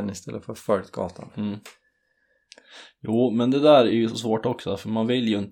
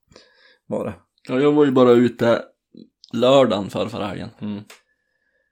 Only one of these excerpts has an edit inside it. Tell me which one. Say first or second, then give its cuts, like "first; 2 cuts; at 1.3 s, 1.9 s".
second; 1 cut; at 4.4 s